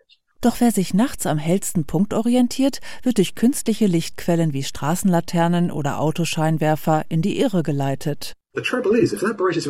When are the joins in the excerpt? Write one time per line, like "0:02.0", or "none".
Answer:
none